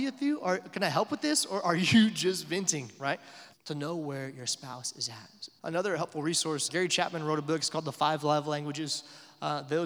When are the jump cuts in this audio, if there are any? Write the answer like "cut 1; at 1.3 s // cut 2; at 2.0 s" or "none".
cut 1; at 3.5 s // cut 2; at 5.6 s // cut 3; at 6.7 s